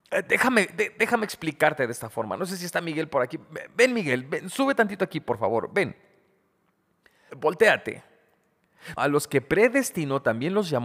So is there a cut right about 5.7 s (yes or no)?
no